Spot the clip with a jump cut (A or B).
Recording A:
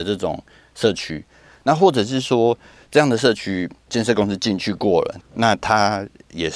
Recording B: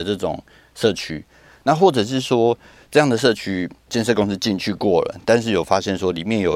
A